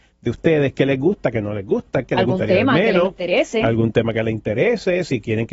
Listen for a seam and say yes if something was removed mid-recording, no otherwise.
yes